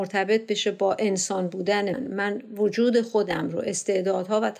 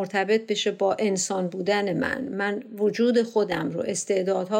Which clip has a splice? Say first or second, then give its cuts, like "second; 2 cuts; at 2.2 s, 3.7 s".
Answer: first; 1 cut; at 1.9 s